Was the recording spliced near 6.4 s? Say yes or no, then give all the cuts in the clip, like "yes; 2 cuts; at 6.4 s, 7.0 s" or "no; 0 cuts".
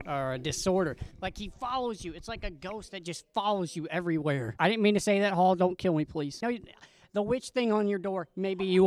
yes; 1 cut; at 6.4 s